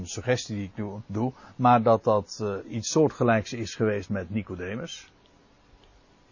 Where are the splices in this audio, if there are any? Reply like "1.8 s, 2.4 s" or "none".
1.1 s